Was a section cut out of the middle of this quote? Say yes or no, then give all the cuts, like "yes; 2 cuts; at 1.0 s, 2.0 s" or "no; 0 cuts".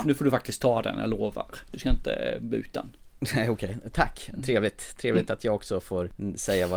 no; 0 cuts